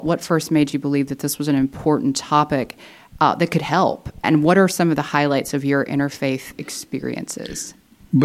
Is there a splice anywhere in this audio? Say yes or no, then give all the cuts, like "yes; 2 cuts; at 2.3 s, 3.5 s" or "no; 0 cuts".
yes; 1 cut; at 4.2 s